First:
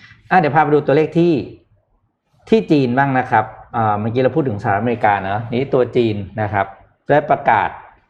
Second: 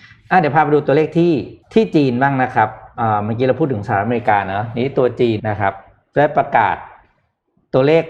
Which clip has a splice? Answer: second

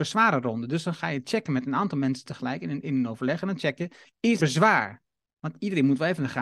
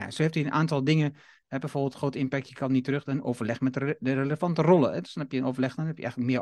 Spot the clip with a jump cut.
first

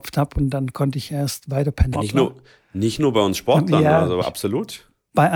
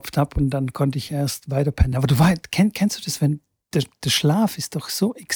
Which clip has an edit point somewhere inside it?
first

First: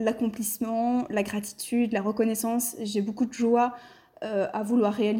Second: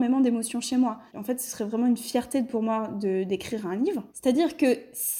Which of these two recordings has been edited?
second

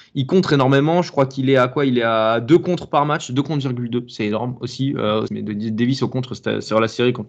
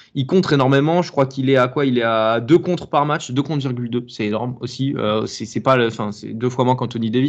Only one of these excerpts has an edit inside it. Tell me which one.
first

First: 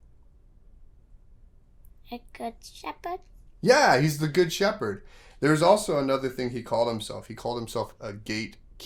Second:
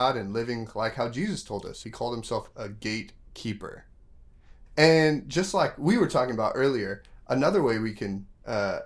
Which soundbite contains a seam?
second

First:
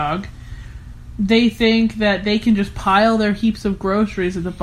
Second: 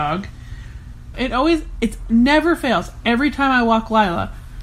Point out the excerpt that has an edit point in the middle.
second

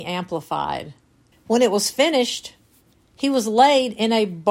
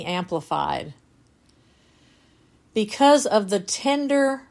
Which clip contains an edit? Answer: first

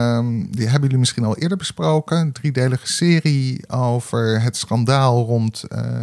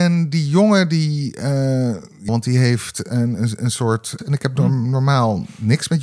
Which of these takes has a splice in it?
second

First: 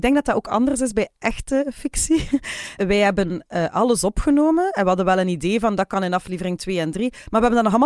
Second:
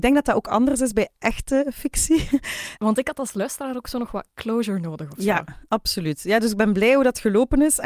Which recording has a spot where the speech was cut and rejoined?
second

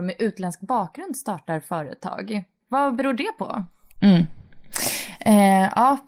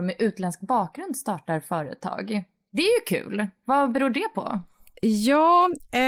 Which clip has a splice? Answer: first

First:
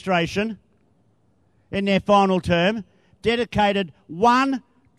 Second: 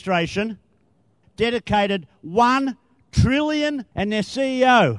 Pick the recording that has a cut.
second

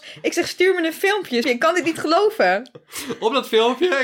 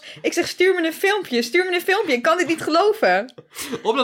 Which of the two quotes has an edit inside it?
first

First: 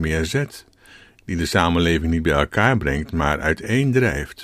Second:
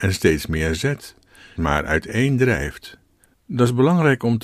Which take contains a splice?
second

